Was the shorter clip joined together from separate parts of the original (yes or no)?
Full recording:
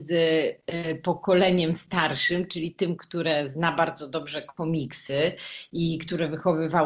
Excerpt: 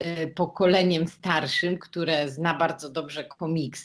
yes